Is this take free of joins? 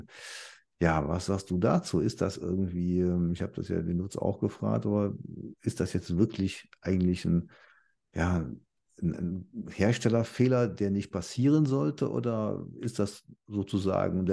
yes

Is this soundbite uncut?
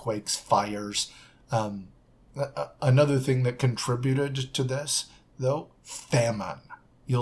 yes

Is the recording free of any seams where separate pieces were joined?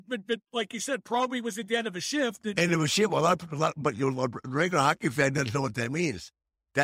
yes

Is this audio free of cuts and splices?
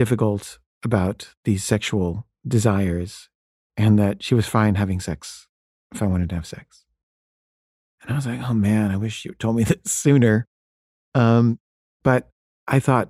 yes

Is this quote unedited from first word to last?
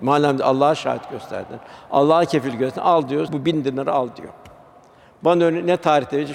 no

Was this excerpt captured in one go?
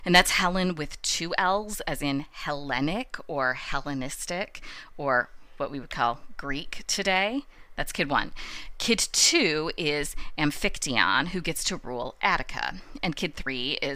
yes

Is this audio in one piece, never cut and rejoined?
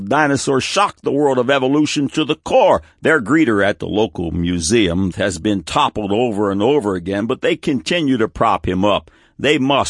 no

